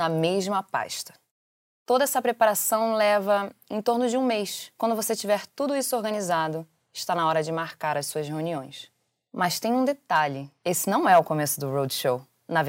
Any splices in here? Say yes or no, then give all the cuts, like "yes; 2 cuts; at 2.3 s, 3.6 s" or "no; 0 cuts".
no; 0 cuts